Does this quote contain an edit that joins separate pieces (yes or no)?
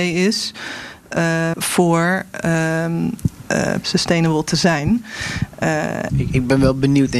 yes